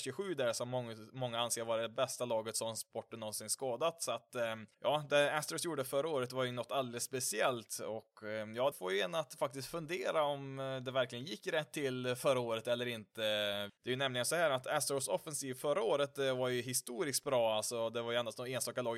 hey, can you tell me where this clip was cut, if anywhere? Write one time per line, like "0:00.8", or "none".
0:04.7
0:08.7
0:13.7